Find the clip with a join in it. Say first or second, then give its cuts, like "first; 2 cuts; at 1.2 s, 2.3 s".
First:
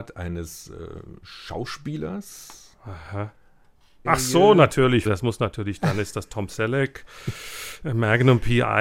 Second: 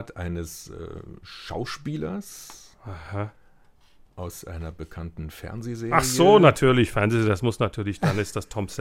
first; 2 cuts; at 4.0 s, 5.0 s